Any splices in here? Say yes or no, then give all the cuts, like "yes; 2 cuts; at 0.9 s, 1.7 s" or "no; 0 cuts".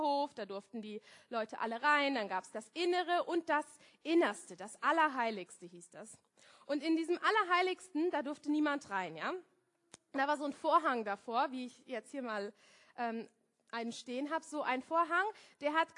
no; 0 cuts